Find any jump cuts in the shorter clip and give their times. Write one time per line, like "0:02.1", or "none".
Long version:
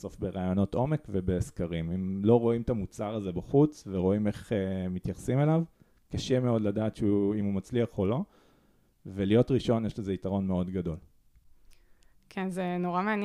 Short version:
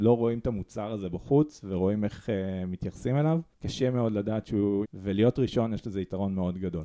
0:03.5
0:04.8